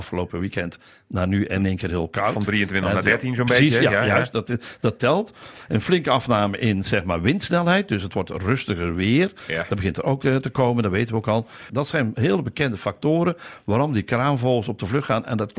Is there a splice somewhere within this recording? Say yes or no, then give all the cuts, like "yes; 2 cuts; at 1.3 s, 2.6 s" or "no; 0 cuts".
yes; 1 cut; at 11.7 s